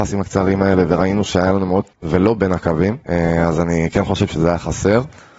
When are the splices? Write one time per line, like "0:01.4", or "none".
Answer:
0:01.9
0:03.0